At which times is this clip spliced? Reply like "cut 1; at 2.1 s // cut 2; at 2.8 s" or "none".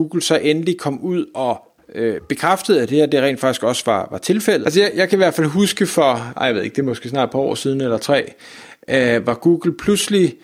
cut 1; at 4.6 s